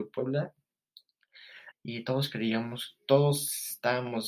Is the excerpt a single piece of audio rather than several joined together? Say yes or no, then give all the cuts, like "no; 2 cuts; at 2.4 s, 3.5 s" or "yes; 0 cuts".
no; 1 cut; at 1.7 s